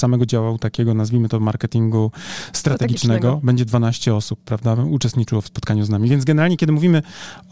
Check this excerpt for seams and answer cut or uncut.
uncut